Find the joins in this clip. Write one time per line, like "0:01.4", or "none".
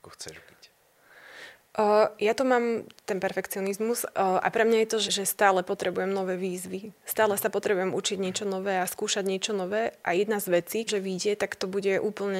0:05.1
0:10.9

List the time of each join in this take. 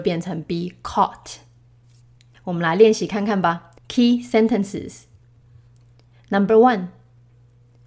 0:02.3
0:03.8

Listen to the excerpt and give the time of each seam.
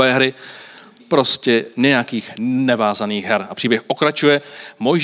0:01.0

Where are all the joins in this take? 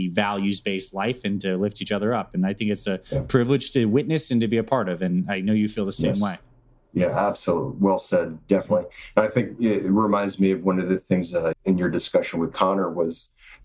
0:11.5

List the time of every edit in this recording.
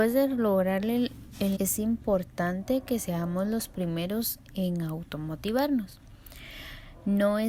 0:01.6

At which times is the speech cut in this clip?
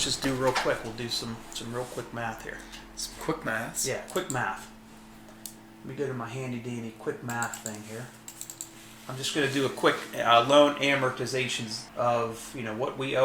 0:11.9

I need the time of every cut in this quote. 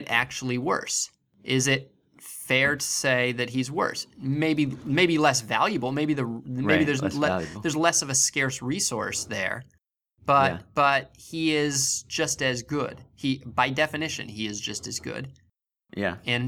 none

